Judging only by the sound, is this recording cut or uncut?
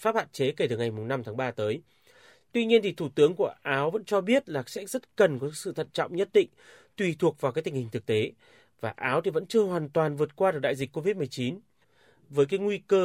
uncut